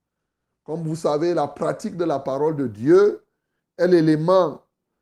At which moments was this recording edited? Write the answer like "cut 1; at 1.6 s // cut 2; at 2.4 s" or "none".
none